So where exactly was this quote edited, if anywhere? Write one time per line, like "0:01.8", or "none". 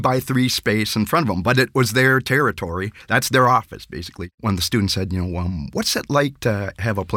0:04.3